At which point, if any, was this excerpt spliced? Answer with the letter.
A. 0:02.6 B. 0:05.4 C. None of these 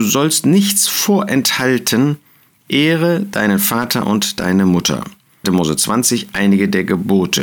B